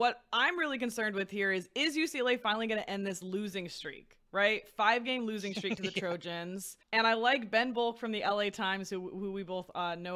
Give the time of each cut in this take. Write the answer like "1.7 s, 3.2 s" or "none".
6.8 s